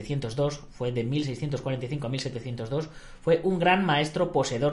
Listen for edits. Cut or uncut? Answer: uncut